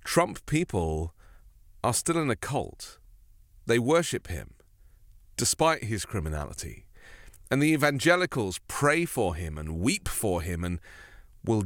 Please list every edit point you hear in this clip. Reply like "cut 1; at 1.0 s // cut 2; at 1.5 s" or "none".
none

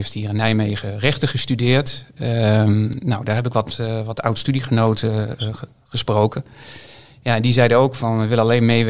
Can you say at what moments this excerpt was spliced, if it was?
none

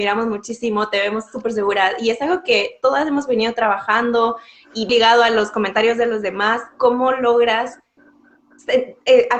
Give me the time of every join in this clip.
cut 1; at 4.9 s

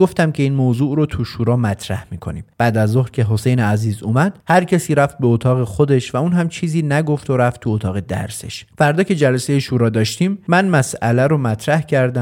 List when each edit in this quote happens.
cut 1; at 8.7 s

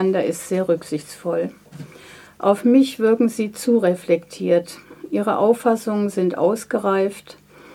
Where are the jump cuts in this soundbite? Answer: none

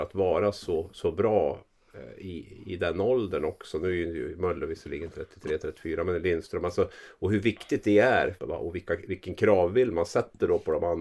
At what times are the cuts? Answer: cut 1; at 8.4 s

